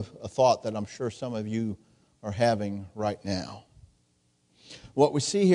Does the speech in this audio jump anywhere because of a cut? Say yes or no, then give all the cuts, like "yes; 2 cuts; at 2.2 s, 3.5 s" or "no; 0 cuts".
no; 0 cuts